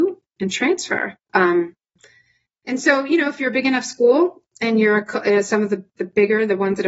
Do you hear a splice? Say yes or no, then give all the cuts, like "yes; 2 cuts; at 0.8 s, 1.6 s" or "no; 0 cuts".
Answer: yes; 1 cut; at 1.3 s